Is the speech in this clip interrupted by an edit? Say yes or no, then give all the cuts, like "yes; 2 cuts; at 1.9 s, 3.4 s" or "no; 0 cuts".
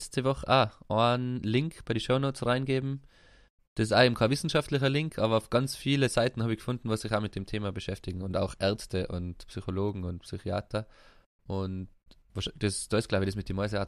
no; 0 cuts